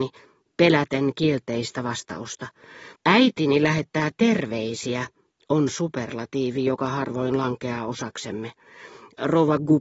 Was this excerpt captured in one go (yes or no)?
no